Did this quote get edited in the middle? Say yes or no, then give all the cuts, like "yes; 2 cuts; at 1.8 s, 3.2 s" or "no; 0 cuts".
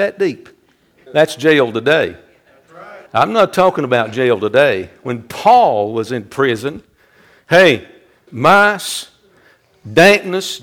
yes; 3 cuts; at 1.1 s, 3.1 s, 8.3 s